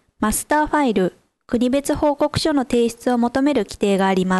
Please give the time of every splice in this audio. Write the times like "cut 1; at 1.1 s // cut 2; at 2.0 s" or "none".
cut 1; at 1.4 s